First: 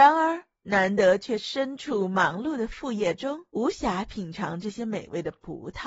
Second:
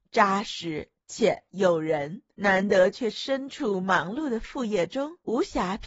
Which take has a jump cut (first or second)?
second